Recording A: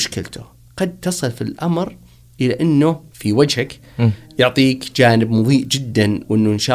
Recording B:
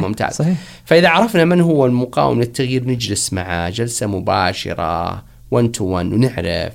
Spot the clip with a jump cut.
A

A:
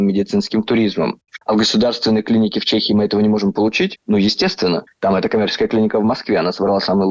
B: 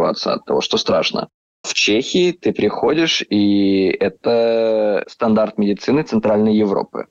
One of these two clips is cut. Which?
A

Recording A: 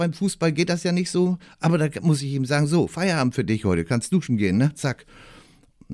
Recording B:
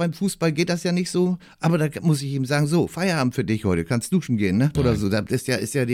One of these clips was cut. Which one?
B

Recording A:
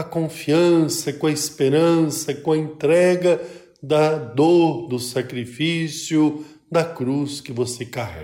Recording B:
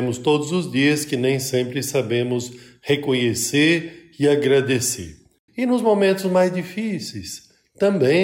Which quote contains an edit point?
B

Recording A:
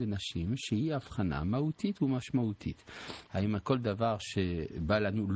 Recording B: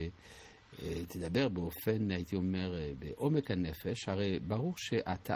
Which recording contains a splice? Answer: A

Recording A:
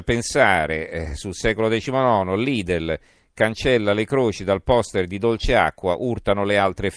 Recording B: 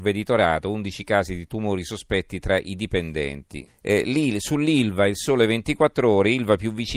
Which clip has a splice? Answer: B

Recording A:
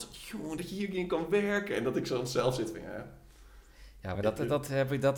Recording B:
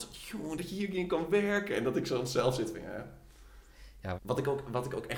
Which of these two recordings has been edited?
B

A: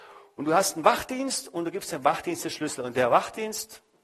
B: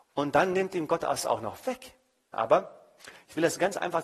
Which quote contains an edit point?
B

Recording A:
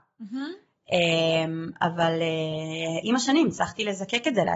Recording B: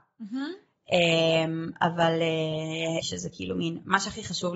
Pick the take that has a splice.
B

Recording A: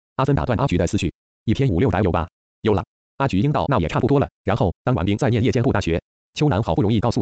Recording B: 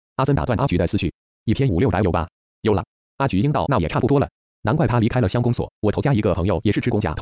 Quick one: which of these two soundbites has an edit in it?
A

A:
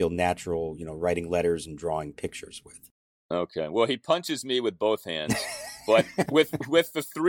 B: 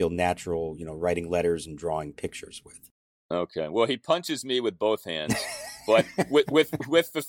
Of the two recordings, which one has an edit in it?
A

